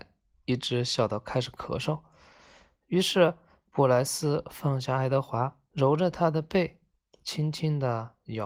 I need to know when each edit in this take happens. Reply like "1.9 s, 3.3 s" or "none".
5.7 s